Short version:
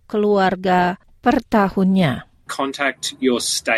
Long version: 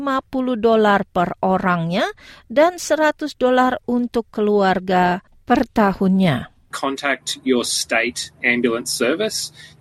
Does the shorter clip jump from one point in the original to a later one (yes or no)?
no